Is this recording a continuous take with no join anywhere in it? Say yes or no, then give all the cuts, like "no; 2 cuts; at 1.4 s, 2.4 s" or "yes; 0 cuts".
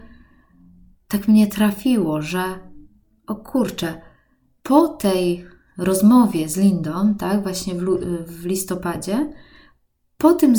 yes; 0 cuts